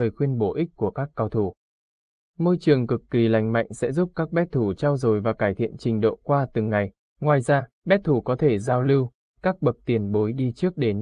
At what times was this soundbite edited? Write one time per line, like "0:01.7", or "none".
0:07.1
0:09.3